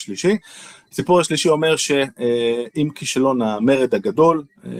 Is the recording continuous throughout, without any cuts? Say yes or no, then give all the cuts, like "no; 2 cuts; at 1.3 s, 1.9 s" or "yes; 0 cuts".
yes; 0 cuts